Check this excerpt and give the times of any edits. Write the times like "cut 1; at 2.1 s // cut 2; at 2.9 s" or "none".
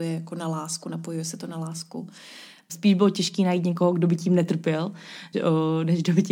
cut 1; at 2.7 s // cut 2; at 5.3 s